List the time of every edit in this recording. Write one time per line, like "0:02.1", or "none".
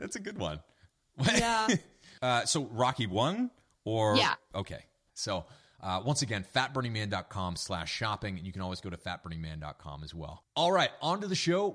0:05.1